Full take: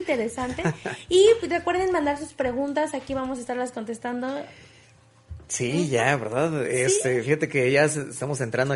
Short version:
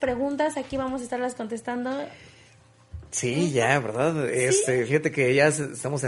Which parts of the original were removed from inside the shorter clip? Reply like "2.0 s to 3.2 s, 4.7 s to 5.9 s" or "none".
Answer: none